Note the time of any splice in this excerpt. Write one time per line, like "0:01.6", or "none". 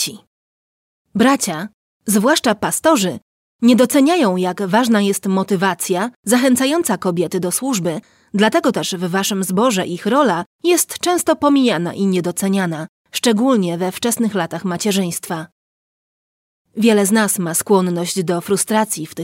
none